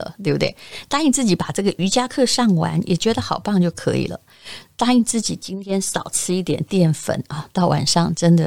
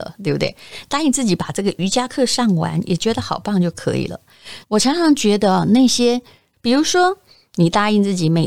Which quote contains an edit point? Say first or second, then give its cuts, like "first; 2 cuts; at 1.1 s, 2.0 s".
second; 2 cuts; at 4.6 s, 6.5 s